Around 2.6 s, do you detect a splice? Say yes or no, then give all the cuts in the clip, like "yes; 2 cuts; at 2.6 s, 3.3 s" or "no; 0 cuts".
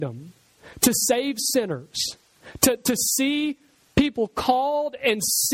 yes; 1 cut; at 2.6 s